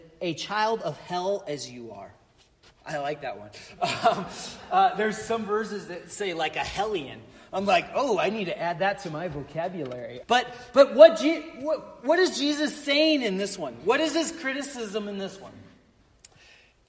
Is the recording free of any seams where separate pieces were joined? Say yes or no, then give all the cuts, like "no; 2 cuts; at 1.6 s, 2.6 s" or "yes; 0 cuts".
no; 1 cut; at 10.2 s